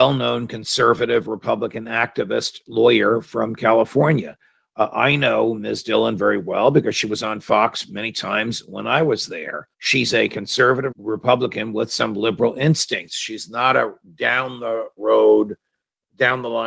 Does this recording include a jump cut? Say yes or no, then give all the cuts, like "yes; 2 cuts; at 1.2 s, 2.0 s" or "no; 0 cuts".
yes; 2 cuts; at 9.7 s, 10.9 s